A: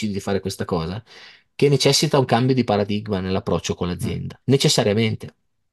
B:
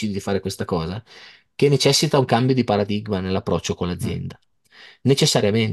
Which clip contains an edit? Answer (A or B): A